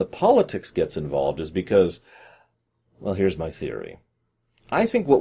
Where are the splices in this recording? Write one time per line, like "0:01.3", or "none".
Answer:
none